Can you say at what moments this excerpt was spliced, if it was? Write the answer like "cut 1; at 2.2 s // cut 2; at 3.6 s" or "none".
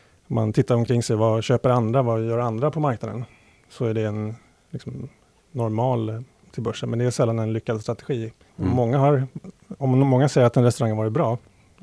cut 1; at 6.4 s // cut 2; at 8.5 s